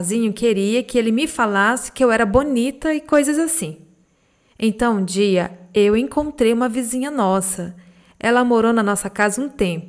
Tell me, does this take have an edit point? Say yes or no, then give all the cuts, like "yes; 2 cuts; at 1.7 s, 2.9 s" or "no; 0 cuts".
no; 0 cuts